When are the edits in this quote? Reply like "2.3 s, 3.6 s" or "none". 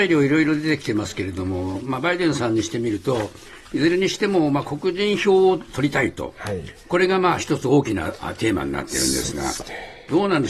none